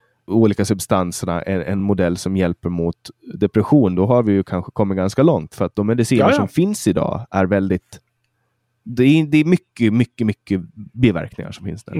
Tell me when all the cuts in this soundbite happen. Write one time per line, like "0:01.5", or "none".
none